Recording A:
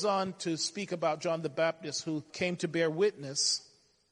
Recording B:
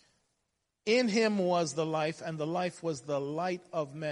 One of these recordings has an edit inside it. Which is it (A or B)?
A